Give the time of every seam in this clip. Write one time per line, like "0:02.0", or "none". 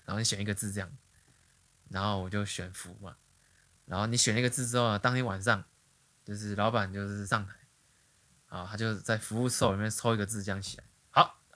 none